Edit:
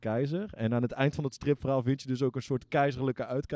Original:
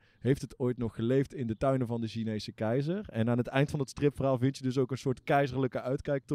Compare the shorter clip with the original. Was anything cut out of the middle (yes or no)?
no